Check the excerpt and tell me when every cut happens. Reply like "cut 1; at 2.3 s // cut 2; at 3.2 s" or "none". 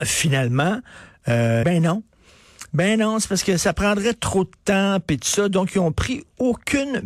cut 1; at 1.6 s